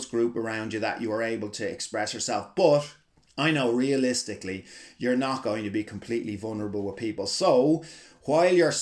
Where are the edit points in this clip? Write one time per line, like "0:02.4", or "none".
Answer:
none